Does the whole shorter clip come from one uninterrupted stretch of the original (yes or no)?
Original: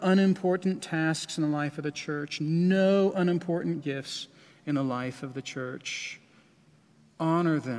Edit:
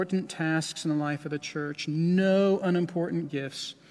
yes